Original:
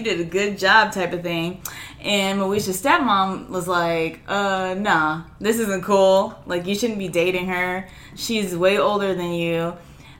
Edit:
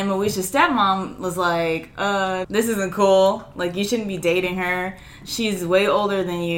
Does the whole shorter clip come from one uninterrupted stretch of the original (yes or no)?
no